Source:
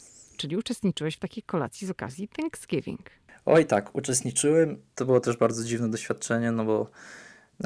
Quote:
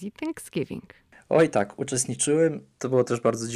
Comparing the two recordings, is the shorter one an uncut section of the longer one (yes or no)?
yes